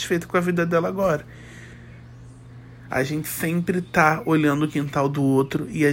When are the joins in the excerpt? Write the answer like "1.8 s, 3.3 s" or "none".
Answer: 2.9 s